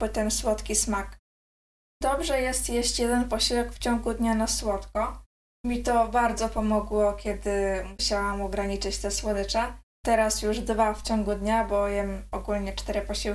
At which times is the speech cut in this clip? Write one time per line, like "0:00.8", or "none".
0:05.5
0:09.9